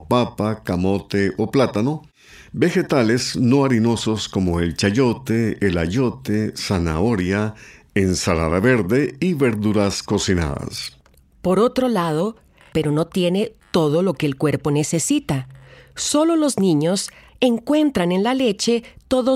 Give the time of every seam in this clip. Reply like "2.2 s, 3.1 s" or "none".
12.7 s, 17.3 s